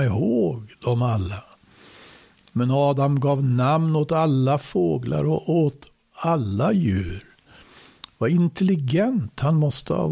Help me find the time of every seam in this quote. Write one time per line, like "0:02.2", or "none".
none

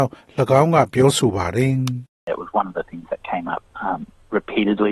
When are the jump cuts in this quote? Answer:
none

